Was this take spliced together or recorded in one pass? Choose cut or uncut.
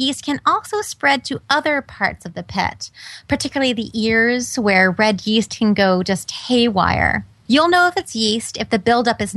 uncut